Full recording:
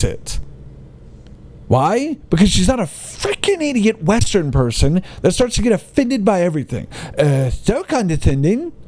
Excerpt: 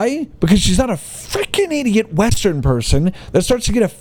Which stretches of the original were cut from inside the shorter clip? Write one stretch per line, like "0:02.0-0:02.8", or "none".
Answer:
none